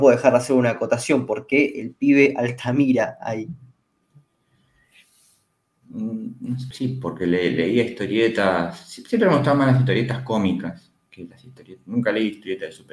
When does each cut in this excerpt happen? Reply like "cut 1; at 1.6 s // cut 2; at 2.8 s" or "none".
cut 1; at 6.7 s